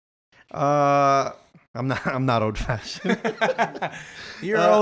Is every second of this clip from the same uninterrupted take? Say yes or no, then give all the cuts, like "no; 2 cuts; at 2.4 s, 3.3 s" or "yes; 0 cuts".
yes; 0 cuts